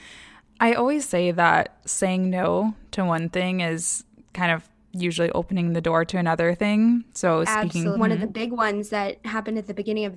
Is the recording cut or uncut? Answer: cut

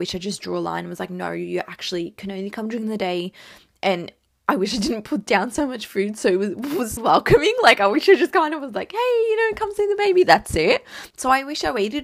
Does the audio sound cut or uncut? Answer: cut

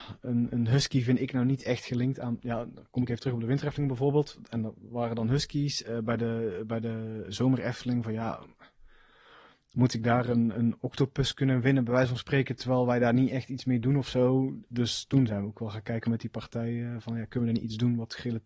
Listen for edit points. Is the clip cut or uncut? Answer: uncut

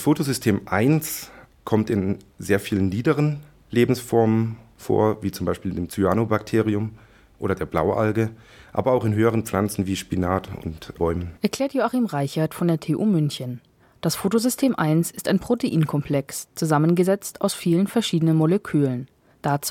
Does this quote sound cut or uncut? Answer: cut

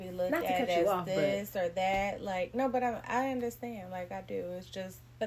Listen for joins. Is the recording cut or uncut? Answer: uncut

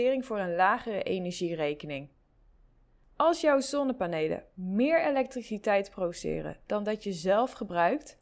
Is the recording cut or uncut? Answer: uncut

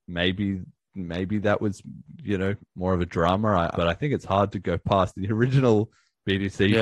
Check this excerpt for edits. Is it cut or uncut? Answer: cut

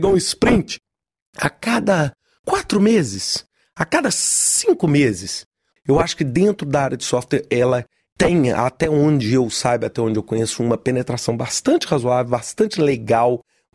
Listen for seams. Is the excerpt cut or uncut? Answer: cut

